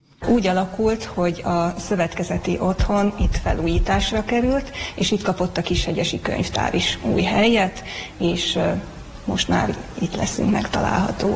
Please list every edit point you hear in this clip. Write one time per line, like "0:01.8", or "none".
none